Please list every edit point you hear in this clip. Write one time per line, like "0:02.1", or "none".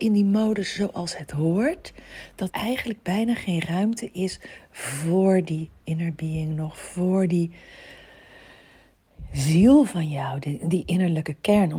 0:02.5